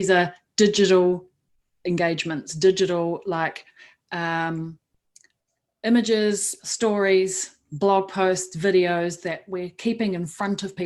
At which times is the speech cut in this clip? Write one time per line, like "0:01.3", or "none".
0:06.6

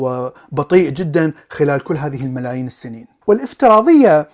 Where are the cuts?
0:03.2

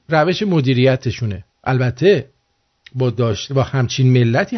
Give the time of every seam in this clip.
0:01.5

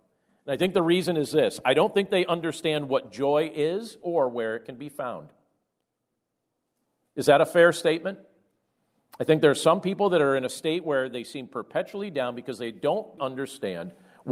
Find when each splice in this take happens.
0:13.2

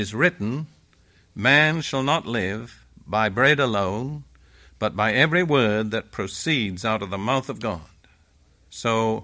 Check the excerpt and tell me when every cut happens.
none

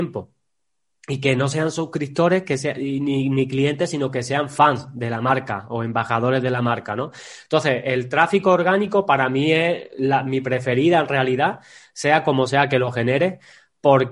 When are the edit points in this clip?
none

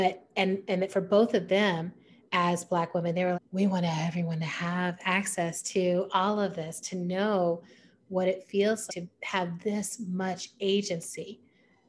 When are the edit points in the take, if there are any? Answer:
0:03.3
0:08.9

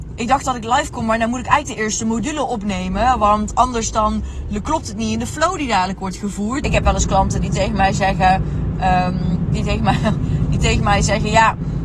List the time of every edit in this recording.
0:06.6

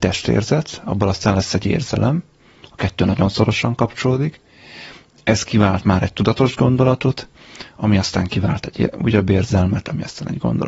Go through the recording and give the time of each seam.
none

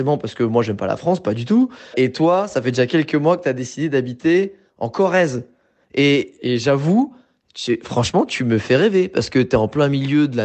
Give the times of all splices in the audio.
0:01.9

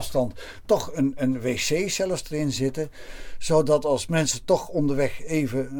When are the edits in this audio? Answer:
none

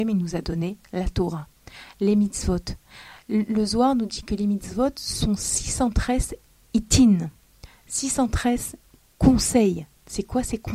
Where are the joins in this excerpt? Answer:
none

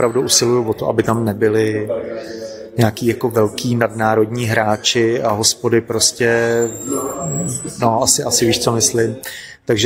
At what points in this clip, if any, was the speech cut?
none

